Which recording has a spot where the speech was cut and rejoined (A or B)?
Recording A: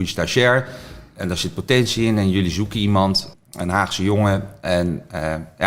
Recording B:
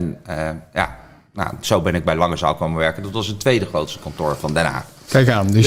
A